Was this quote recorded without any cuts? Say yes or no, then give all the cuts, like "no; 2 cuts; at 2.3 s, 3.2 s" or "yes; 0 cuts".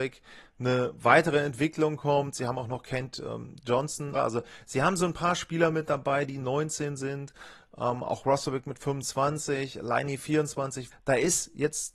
no; 2 cuts; at 4.2 s, 10.9 s